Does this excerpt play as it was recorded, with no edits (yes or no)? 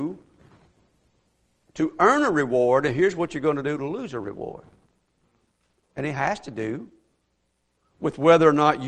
yes